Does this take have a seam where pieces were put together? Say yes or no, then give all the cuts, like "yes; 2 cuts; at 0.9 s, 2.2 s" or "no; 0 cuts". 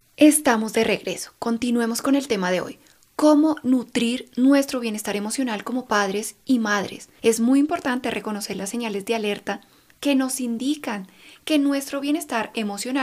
yes; 1 cut; at 7.2 s